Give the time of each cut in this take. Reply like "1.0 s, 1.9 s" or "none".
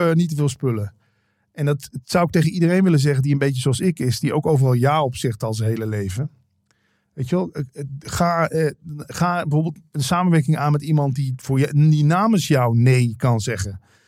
none